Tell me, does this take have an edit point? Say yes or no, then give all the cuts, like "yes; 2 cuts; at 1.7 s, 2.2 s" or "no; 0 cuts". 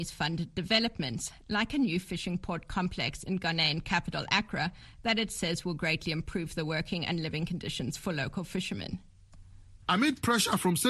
yes; 1 cut; at 9.8 s